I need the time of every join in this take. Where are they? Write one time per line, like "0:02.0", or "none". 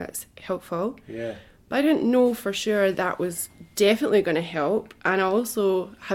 0:02.9